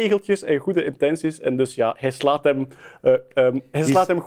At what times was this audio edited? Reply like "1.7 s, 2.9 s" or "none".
none

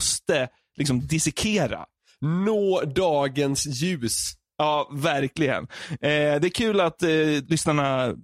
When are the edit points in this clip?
none

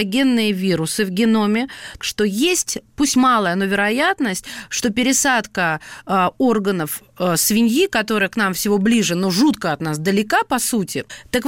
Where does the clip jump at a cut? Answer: 2.0 s

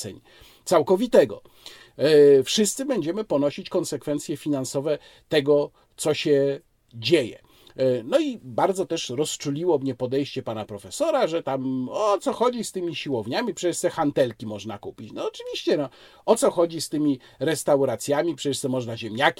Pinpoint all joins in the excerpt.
none

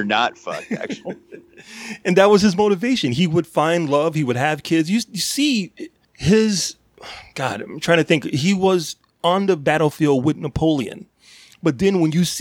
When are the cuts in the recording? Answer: none

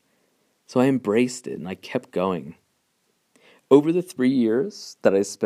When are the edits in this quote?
none

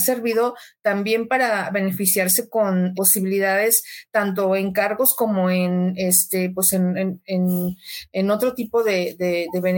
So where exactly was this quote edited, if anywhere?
2.9 s

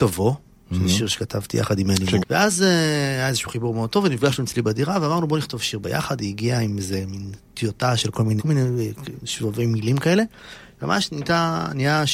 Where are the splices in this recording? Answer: 2.2 s, 8.4 s

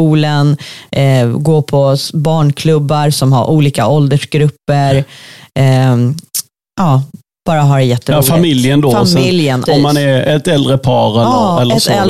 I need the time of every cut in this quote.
9.7 s

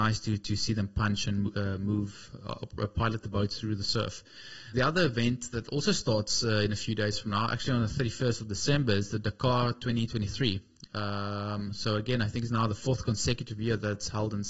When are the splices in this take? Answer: 4.7 s

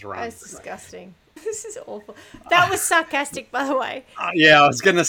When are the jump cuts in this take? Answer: 1.4 s

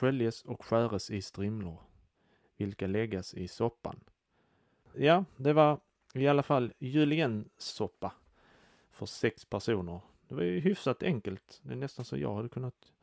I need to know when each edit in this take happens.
4.8 s

